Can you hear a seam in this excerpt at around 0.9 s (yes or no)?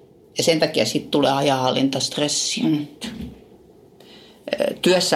no